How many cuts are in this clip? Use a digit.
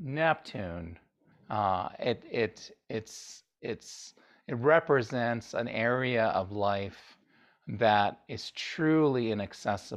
1